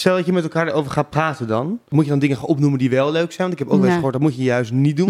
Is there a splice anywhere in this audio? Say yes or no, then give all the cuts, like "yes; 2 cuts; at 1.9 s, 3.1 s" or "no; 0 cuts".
no; 0 cuts